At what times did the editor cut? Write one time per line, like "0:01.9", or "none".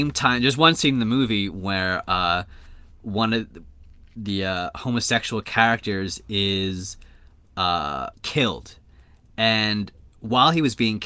0:08.2

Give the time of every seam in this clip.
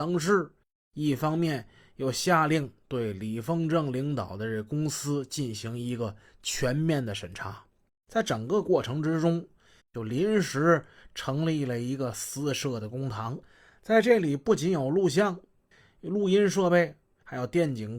0:07.9
0:09.8

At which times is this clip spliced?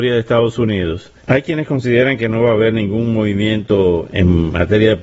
0:01.2

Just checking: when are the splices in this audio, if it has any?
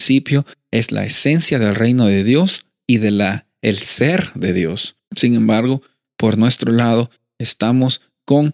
0:05.1

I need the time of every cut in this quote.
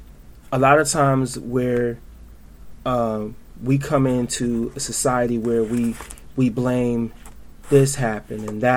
none

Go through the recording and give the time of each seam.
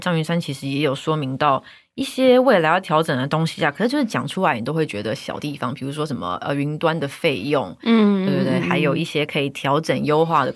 none

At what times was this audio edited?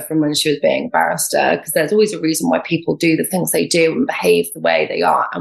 none

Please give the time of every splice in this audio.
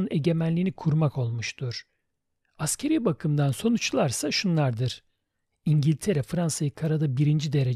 none

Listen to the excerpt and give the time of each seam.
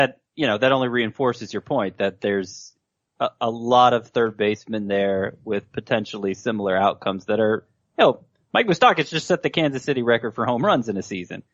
none

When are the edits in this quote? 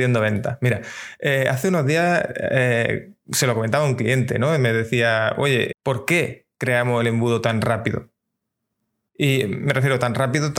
0:05.7

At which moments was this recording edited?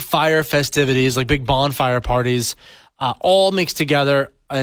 none

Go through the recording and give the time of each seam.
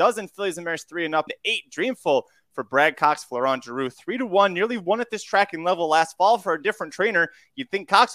0:01.3

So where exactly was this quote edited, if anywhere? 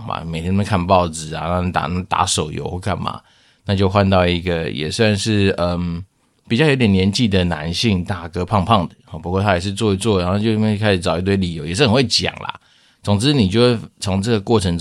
none

